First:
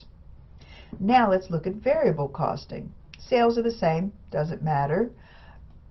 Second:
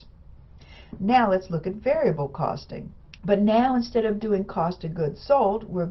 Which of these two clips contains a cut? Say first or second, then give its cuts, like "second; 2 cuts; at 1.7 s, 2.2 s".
second; 1 cut; at 3.2 s